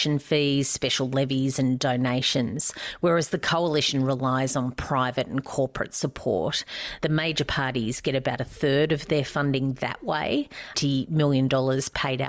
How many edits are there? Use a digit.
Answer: 2